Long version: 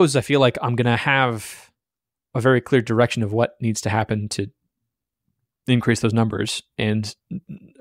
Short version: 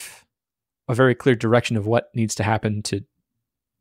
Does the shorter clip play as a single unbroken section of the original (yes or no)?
yes